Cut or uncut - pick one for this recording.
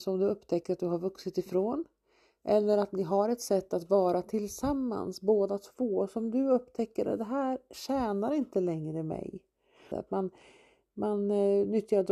cut